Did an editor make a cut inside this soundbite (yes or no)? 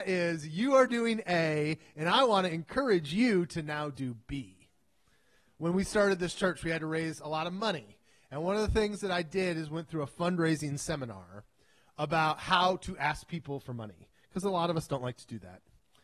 no